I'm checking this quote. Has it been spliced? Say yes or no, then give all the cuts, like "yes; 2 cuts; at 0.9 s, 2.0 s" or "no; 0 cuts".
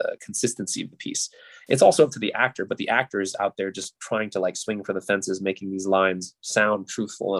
no; 0 cuts